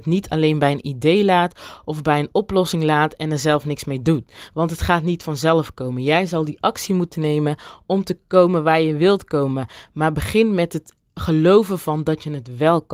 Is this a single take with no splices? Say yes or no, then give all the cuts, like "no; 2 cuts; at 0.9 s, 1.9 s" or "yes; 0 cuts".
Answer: yes; 0 cuts